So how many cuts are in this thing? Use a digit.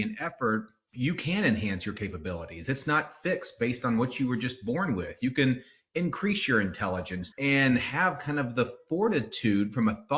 1